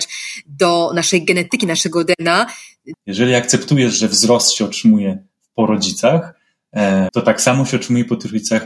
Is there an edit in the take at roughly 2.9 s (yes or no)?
yes